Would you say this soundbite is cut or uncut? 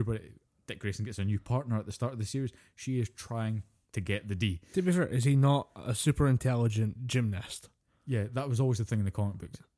uncut